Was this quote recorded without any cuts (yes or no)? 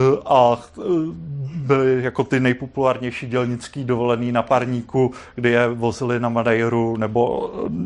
yes